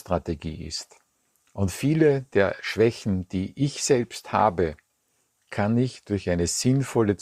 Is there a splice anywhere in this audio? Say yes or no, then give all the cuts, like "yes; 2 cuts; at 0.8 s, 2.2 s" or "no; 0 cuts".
no; 0 cuts